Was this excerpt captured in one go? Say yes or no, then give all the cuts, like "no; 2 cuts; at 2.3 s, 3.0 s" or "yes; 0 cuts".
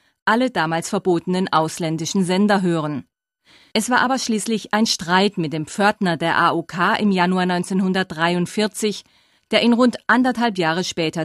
yes; 0 cuts